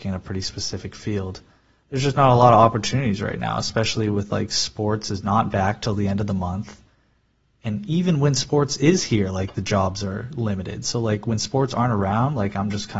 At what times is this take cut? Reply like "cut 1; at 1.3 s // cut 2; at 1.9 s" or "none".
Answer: none